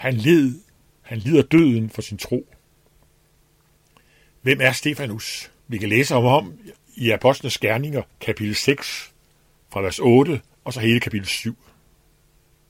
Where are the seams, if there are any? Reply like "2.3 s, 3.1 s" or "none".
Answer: 5.6 s, 8.1 s

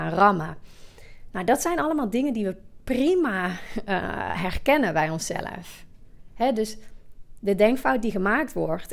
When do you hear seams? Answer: 6.3 s

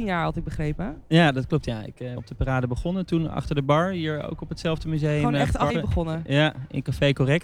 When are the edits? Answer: 2.2 s, 5.7 s

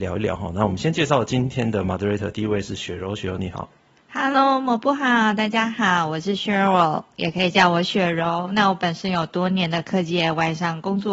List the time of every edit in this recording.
none

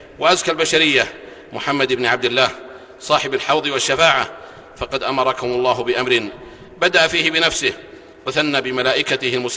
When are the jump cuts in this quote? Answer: none

